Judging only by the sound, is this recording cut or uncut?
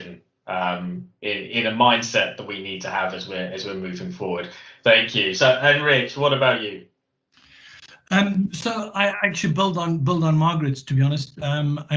uncut